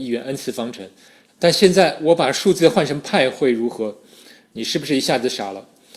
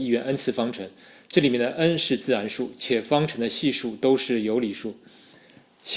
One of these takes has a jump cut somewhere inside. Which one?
first; 2 cuts; at 1.3 s, 4.4 s

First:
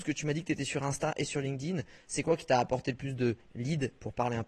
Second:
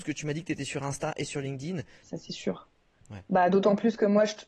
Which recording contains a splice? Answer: second; 1 cut; at 2.0 s

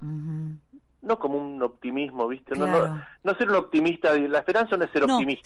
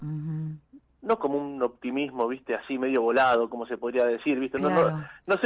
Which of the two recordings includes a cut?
first; 1 cut; at 2.5 s

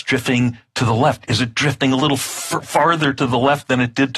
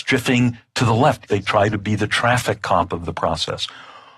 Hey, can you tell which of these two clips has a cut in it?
second; 1 cut; at 1.3 s

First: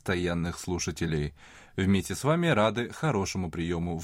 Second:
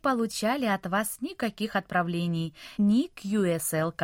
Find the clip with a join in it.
second; 1 cut; at 2.8 s

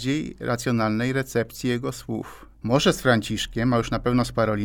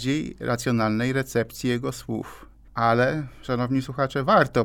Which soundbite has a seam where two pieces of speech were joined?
first; 1 cut; at 2.6 s

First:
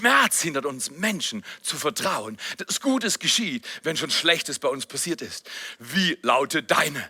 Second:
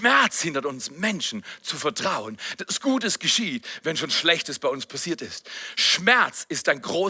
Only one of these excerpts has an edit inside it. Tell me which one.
first; 1 cut; at 5.8 s

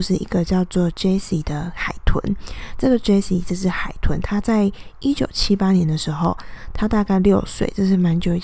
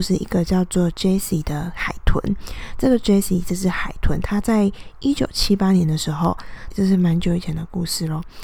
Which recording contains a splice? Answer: second; 1 cut; at 6.7 s

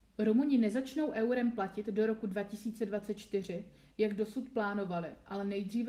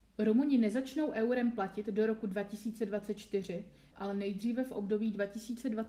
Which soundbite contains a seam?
second; 1 cut; at 3.9 s

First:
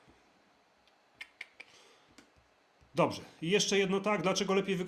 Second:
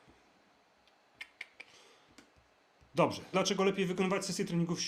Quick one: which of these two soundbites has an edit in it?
second; 1 cut; at 3.3 s

